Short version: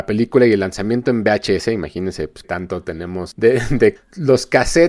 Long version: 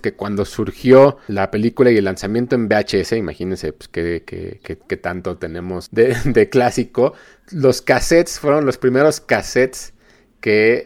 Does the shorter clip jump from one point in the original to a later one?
yes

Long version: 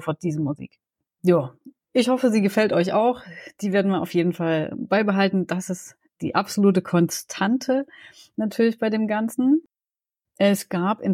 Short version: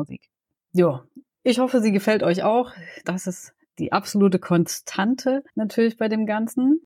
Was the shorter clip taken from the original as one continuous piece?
no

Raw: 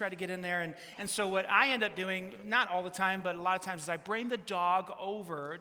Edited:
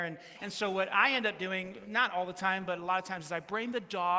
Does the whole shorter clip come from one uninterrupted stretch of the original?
yes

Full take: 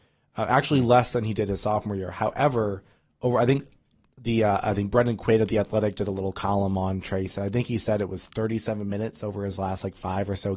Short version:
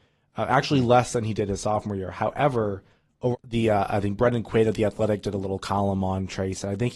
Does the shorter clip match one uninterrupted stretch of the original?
no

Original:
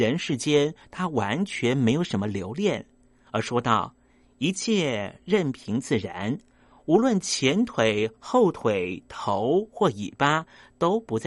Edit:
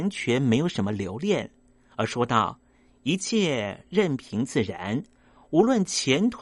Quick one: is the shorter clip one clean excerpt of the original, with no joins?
yes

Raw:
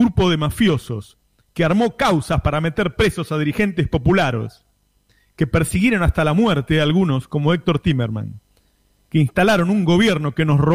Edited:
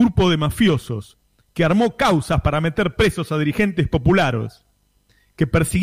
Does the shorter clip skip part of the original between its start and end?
no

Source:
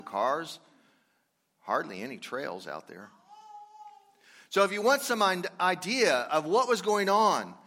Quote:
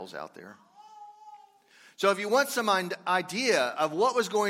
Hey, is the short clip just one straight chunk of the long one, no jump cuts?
yes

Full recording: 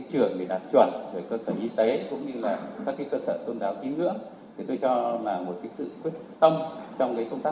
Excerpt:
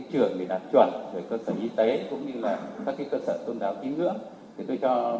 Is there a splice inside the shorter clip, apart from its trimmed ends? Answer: no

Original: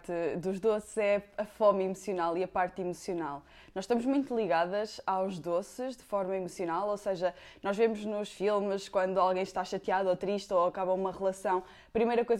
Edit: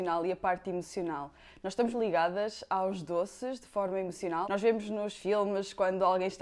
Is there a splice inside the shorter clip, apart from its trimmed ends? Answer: yes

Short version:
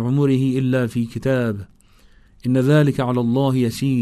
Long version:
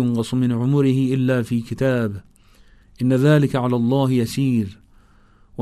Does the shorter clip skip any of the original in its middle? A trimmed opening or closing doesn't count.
no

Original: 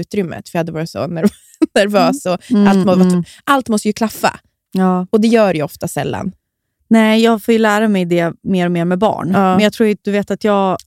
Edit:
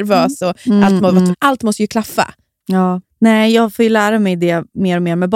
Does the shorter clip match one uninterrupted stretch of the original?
no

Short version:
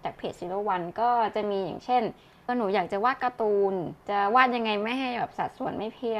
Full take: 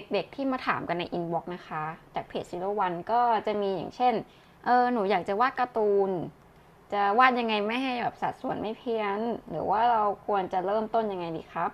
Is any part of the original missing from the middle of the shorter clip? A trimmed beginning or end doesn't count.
yes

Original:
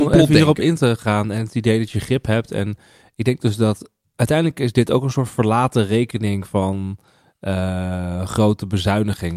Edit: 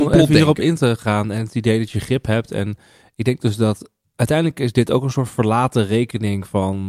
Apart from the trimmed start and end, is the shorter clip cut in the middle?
no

